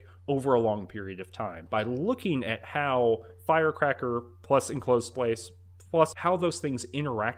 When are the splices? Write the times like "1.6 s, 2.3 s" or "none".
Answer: 1.7 s, 6.1 s